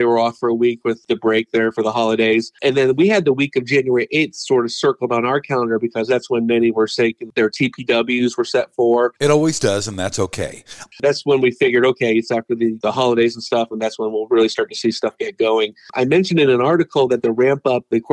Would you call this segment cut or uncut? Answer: cut